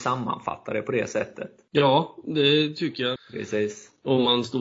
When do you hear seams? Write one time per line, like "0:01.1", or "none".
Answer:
0:03.2